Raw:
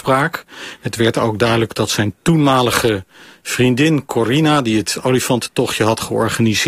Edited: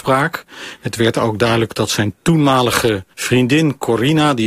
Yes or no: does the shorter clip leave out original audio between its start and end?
yes